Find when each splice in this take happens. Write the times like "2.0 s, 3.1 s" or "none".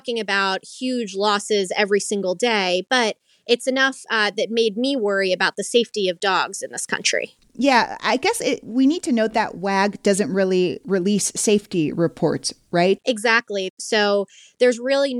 13.0 s